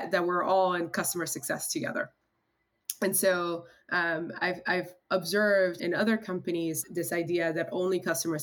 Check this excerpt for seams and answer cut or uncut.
cut